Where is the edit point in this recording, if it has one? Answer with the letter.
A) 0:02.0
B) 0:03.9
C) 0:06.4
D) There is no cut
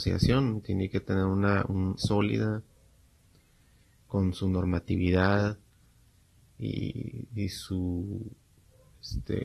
A